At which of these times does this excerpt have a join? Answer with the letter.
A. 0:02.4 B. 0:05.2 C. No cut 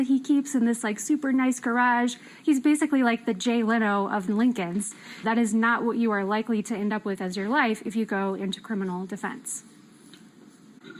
B